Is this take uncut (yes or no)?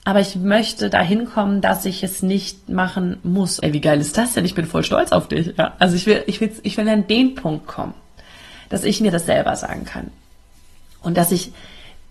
no